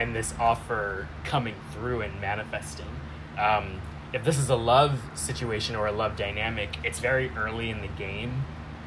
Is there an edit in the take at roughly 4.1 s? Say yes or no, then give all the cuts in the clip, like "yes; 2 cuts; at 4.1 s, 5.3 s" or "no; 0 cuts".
no; 0 cuts